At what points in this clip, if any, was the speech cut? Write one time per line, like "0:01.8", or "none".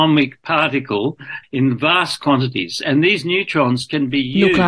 0:01.4

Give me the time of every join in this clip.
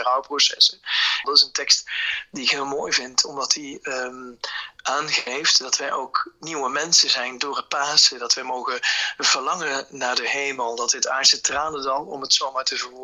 0:01.2

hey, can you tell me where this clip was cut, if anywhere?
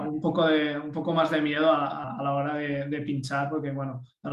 0:02.0

